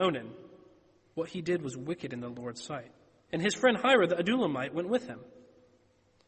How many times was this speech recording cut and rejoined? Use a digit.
2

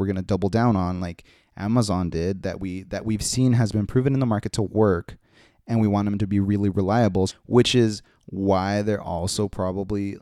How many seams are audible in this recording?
1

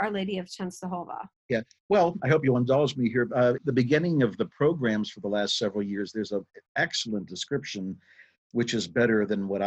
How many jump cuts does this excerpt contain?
2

